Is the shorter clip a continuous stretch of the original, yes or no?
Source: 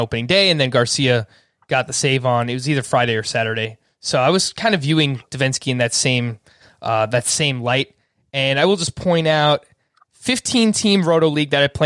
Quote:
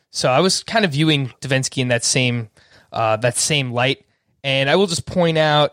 yes